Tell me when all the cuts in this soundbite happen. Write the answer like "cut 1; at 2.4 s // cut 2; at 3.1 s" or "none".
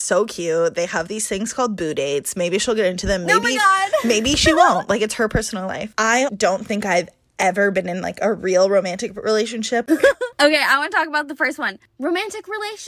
cut 1; at 6.3 s // cut 2; at 9.9 s